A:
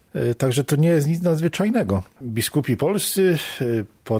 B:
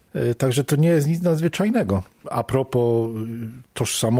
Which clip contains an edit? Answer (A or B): A